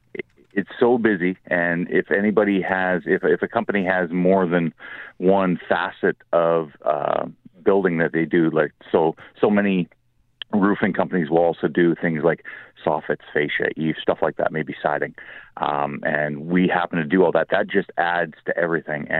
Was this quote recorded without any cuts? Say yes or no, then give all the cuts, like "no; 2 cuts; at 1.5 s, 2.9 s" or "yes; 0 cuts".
no; 2 cuts; at 14.0 s, 17.5 s